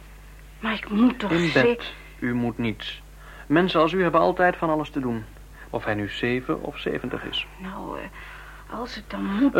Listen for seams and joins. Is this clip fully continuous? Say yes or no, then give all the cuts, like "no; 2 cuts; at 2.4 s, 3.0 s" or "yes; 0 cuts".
no; 1 cut; at 5.7 s